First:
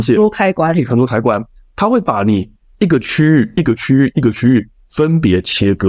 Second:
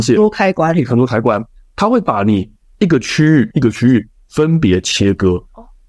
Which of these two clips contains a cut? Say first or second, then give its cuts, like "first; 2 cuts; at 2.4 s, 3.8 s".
second; 1 cut; at 3.5 s